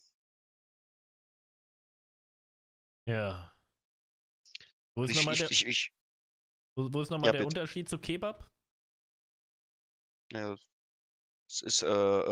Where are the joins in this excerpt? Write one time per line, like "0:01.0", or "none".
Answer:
none